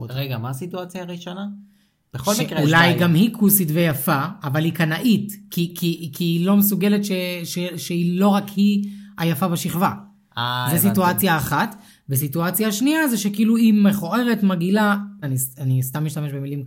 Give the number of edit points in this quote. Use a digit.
1